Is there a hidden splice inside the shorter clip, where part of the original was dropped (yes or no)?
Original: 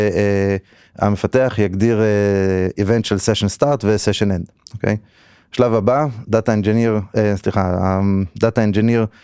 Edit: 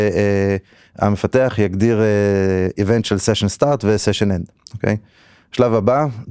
no